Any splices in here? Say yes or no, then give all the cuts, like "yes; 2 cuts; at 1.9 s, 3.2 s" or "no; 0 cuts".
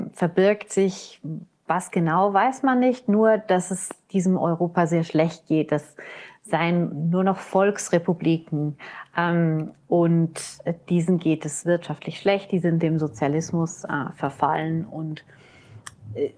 no; 0 cuts